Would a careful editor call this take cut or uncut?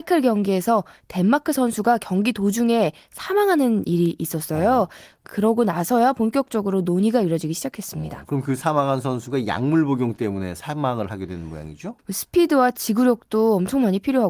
cut